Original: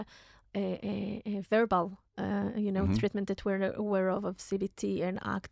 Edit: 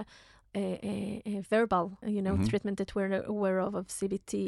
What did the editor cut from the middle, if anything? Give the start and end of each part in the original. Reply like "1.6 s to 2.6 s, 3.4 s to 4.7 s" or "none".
2.0 s to 2.5 s